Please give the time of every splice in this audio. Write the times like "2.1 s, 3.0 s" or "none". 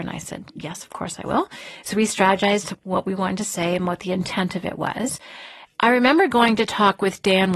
5.7 s